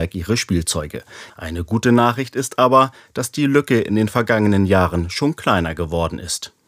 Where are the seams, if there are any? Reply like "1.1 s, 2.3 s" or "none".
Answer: 1.3 s